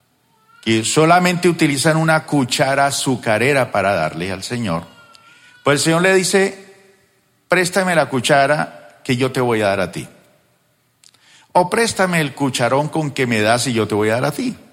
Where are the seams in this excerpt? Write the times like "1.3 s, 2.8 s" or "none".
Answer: none